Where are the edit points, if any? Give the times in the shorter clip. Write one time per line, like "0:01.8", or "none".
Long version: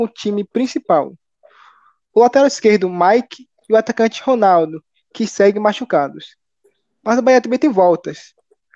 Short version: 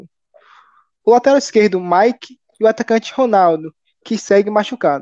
none